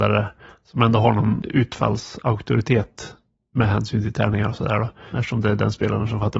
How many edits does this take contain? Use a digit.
1